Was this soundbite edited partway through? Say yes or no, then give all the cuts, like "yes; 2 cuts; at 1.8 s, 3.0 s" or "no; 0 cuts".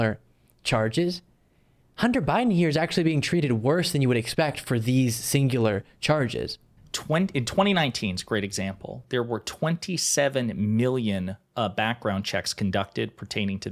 yes; 1 cut; at 6.8 s